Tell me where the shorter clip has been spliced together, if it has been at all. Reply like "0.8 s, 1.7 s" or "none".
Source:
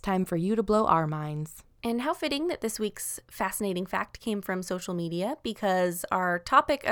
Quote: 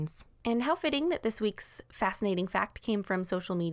none

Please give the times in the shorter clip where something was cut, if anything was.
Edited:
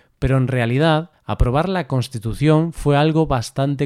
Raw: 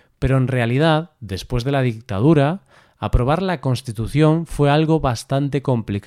1.1 s

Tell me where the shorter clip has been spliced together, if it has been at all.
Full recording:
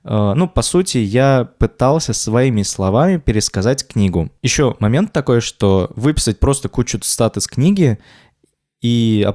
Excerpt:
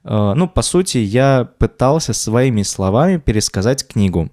none

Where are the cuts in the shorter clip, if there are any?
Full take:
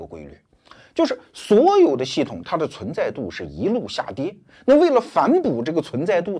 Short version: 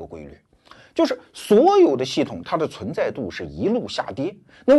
none

